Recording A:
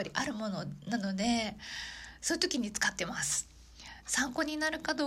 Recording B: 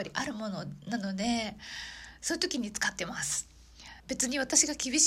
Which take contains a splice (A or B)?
B